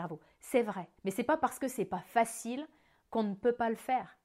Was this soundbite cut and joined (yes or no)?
yes